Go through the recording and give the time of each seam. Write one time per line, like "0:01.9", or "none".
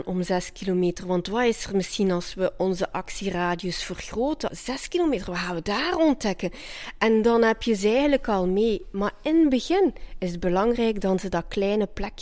0:04.5